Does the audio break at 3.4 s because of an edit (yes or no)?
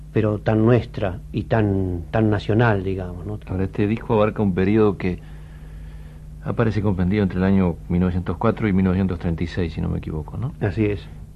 yes